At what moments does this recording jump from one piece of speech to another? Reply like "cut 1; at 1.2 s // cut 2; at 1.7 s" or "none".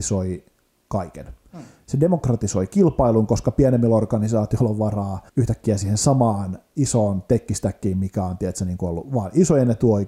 cut 1; at 5.3 s